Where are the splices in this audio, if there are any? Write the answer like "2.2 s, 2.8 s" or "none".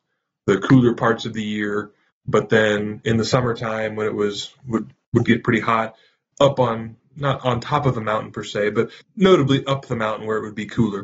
6.3 s, 9.0 s